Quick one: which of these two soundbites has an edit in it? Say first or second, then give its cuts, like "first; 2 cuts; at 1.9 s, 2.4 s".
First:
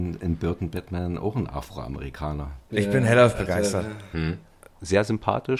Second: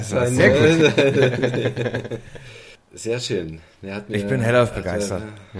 first; 2 cuts; at 2.7 s, 4.1 s